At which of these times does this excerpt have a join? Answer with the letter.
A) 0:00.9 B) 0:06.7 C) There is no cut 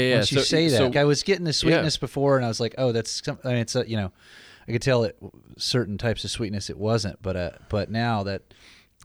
A